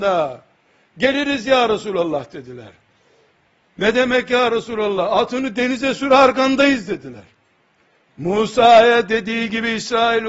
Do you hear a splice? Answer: no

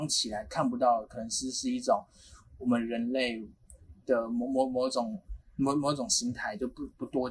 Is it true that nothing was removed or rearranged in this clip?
yes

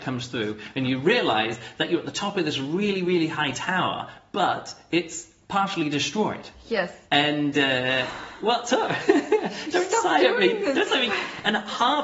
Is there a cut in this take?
yes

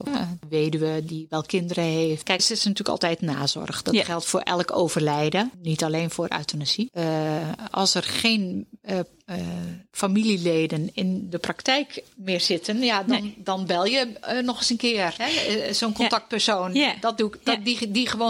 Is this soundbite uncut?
no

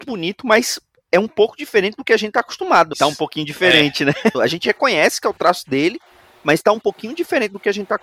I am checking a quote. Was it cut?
yes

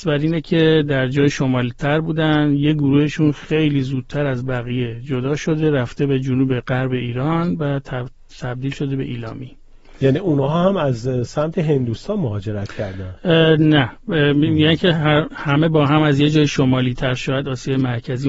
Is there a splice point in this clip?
no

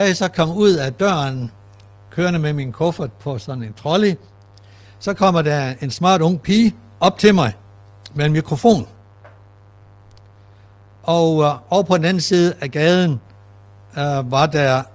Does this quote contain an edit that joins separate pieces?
no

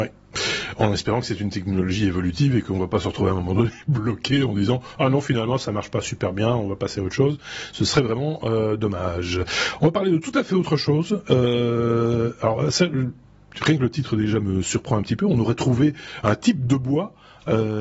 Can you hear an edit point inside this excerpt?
no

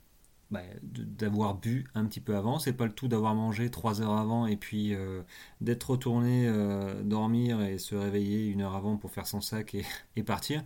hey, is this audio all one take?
yes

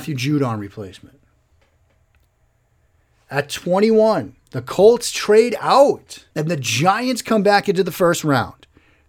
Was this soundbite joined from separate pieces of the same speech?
yes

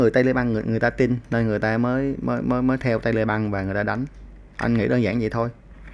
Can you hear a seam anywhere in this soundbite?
no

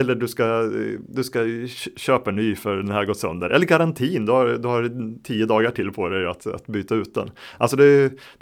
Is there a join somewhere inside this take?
no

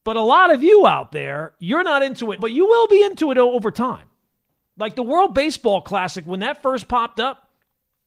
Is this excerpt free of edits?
no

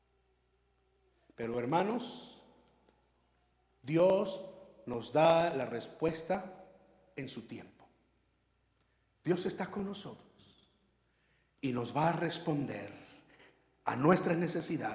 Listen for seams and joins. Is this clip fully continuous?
yes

